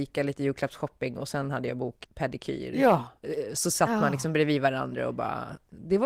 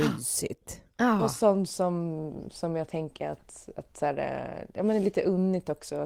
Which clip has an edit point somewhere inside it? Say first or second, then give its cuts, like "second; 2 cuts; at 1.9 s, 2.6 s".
first; 1 cut; at 2.0 s